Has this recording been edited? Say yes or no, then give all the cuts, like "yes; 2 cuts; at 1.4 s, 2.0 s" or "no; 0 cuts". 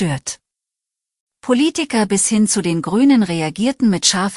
no; 0 cuts